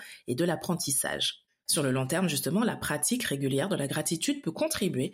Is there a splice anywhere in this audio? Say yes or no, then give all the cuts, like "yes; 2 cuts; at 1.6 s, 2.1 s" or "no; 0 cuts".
yes; 1 cut; at 1.7 s